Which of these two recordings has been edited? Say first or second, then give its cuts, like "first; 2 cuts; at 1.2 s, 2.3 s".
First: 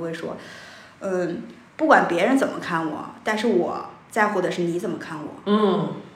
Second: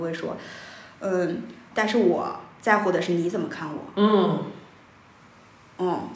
second; 1 cut; at 1.7 s